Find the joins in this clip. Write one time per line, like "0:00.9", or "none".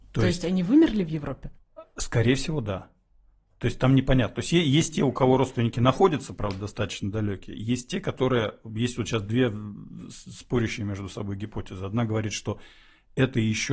none

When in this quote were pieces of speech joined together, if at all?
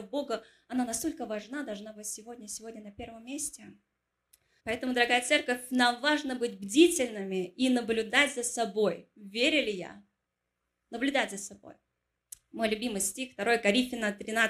0:04.6

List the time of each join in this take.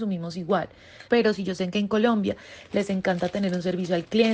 0:01.1

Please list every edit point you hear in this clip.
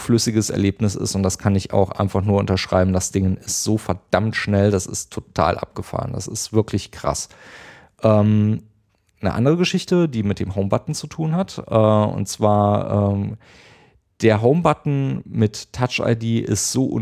none

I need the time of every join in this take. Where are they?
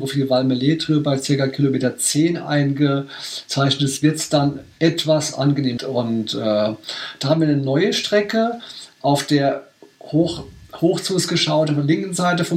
0:05.8

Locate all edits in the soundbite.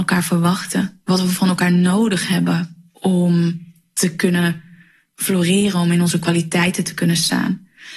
none

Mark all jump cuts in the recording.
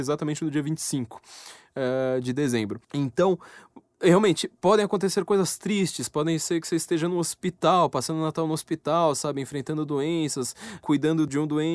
0:02.8

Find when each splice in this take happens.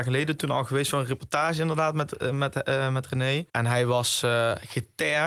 0:03.5

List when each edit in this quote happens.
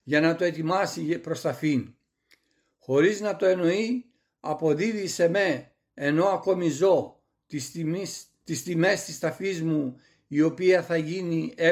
none

